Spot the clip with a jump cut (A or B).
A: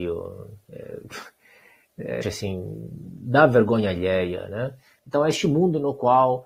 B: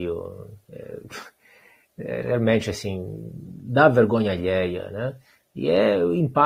A